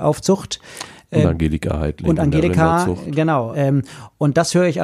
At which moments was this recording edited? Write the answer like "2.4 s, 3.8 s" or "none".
3.5 s